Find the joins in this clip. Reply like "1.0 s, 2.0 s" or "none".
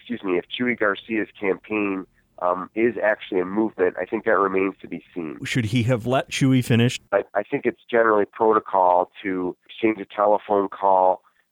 5.4 s